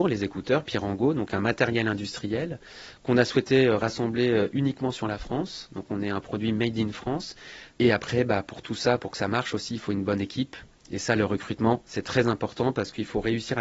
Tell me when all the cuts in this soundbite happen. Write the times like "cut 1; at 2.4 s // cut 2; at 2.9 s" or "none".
cut 1; at 7.7 s